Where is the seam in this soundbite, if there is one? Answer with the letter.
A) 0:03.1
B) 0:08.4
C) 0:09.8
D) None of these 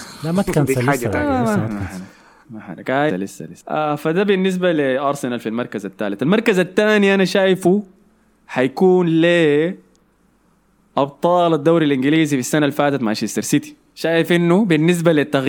A